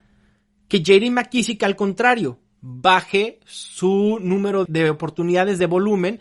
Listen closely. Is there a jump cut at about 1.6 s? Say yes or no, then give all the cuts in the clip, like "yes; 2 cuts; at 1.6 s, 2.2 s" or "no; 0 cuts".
no; 1 cut; at 4.7 s